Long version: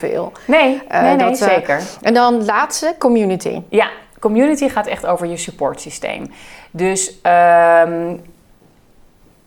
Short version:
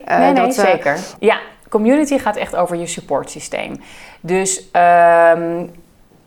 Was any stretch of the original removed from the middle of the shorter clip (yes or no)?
yes